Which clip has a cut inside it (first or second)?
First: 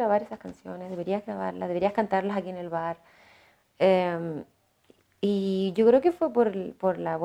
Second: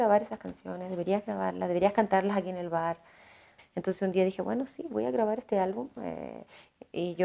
second